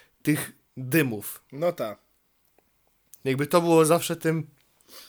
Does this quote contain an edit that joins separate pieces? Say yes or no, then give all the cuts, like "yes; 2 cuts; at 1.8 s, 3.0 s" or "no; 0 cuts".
no; 0 cuts